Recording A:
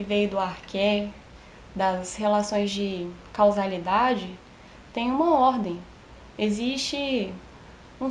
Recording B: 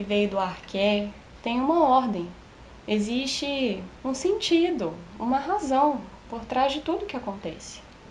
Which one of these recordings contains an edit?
B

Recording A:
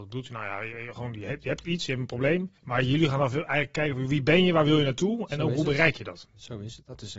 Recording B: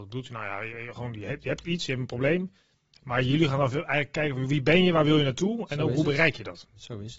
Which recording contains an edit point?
A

